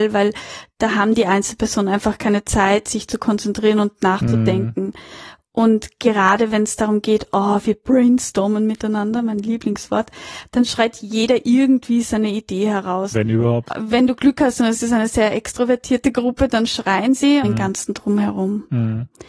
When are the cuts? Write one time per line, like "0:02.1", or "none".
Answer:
0:13.7
0:17.4